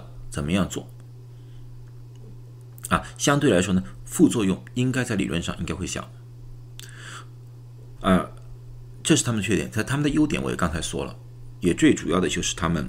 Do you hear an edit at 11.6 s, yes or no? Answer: no